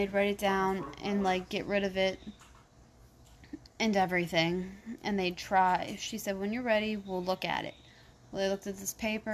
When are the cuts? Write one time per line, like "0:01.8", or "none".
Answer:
none

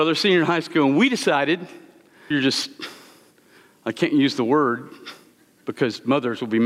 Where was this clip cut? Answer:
0:02.3

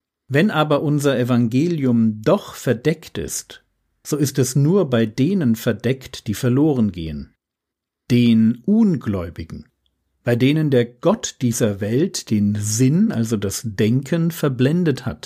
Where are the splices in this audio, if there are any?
none

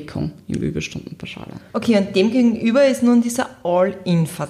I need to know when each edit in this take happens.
0:01.7

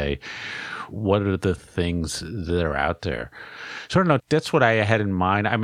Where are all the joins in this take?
0:04.2

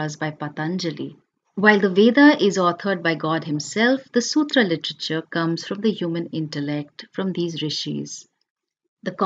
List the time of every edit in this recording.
none

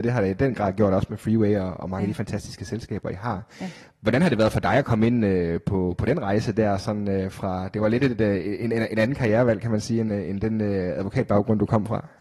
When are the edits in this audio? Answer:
none

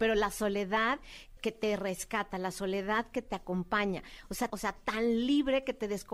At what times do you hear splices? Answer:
0:01.4
0:04.5

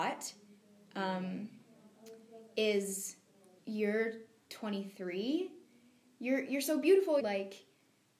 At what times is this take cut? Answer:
0:03.6
0:07.2

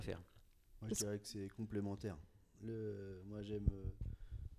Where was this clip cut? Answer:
none

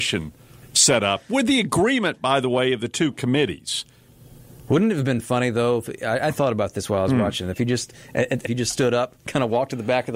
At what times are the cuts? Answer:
0:08.4

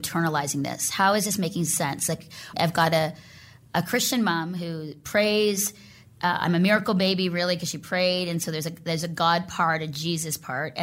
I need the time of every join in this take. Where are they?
0:02.5

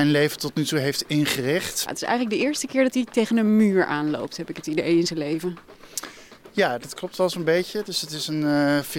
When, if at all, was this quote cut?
0:01.9

